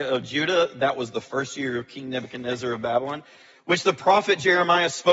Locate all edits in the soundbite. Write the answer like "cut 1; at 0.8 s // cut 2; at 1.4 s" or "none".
none